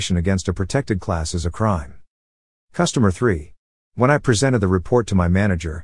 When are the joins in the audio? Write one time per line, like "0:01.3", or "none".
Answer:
0:03.7